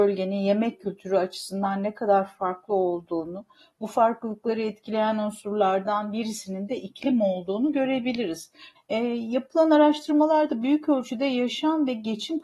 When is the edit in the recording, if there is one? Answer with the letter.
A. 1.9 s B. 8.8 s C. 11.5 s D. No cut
B